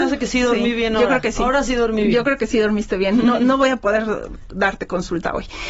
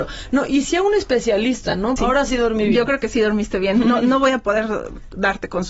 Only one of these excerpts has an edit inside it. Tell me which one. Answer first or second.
second